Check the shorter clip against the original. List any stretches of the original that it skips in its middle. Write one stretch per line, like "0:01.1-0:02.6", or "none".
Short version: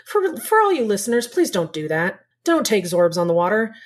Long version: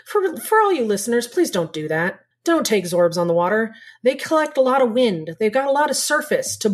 none